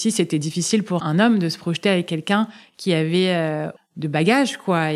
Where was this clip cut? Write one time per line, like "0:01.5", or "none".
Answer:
0:01.0
0:03.8

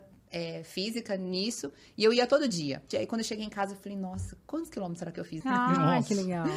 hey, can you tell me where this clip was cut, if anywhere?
0:02.9
0:05.4

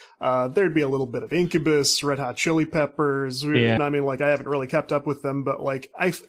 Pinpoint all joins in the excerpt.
0:03.8

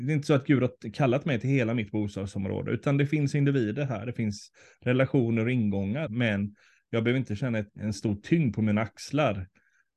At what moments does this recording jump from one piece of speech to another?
0:06.1
0:07.7

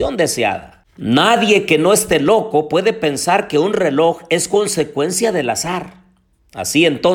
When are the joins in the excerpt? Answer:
none

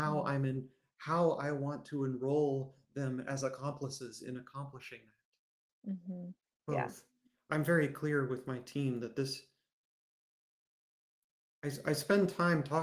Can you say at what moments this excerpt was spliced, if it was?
0:06.5

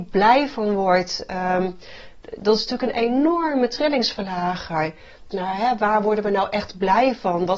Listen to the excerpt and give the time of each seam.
0:05.3

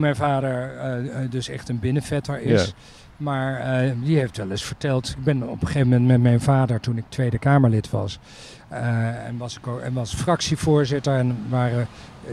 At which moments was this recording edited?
none

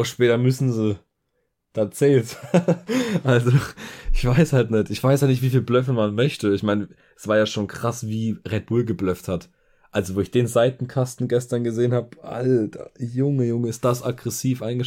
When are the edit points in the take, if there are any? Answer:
none

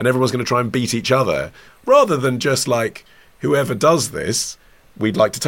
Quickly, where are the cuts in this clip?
0:01.7

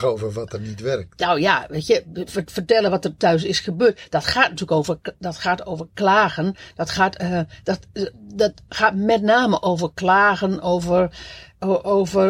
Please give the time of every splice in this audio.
0:02.3

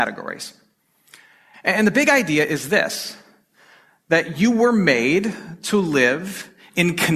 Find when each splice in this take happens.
0:01.5

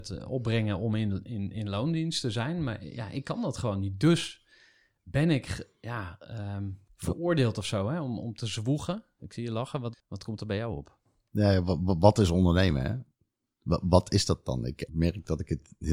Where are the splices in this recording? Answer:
0:09.9
0:14.9

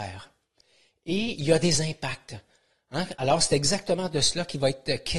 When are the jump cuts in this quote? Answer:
0:03.1

